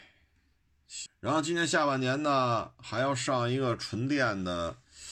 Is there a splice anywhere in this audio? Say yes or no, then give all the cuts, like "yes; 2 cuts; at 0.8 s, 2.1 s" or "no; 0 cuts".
yes; 1 cut; at 1.1 s